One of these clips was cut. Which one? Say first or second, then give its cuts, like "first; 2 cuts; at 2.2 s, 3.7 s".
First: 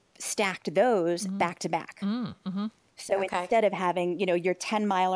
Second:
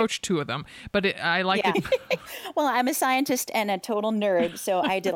second; 1 cut; at 1.7 s